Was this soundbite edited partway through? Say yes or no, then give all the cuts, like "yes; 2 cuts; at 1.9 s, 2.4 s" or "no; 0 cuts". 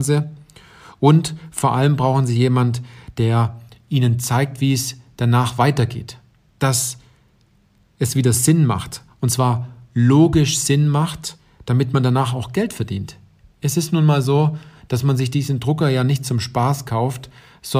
no; 0 cuts